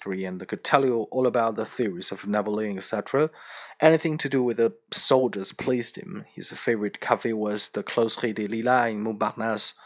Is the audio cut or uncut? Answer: uncut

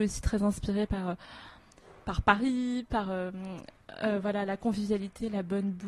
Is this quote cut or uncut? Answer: uncut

